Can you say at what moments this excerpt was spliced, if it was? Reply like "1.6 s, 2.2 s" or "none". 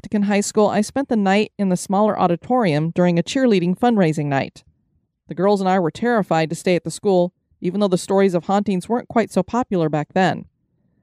none